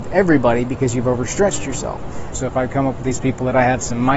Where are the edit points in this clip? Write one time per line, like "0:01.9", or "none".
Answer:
0:02.3